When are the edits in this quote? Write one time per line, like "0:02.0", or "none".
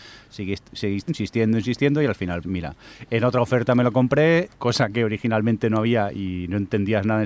0:01.1
0:02.4
0:04.5